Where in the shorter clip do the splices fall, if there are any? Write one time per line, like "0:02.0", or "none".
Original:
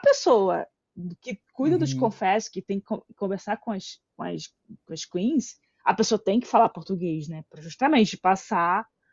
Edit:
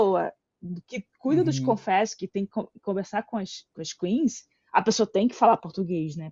0:03.7